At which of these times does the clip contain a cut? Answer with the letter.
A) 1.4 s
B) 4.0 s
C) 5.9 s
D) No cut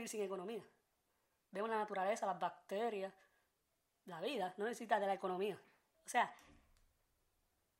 C